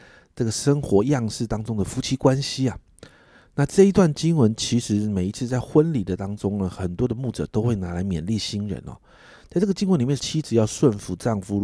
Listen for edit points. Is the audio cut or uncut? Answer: cut